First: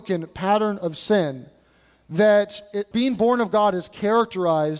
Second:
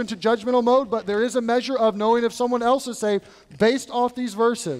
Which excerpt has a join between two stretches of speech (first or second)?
first